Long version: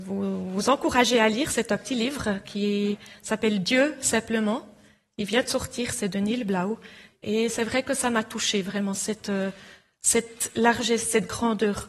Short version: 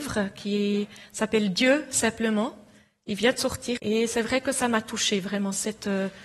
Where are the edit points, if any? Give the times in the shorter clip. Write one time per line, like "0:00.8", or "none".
0:03.8